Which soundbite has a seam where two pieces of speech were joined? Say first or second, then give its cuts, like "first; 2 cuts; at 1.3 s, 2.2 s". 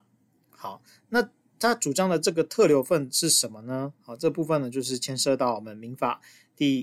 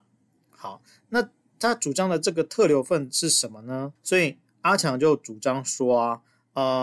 second; 1 cut; at 4.0 s